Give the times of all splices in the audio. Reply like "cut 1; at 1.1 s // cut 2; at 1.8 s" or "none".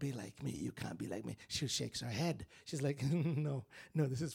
none

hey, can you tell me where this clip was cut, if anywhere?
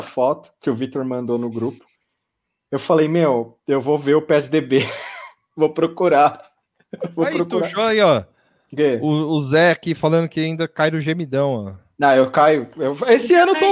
none

